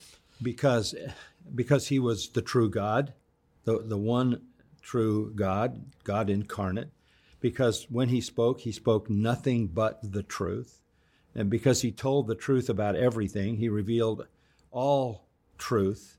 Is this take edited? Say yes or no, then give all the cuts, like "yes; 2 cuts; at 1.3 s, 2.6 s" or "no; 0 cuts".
no; 0 cuts